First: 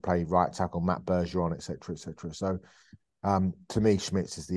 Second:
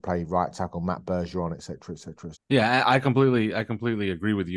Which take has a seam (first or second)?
second